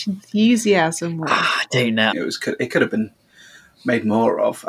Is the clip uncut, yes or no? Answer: no